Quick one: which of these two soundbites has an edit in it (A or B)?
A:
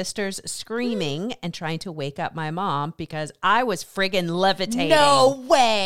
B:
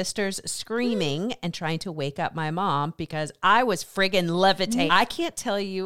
B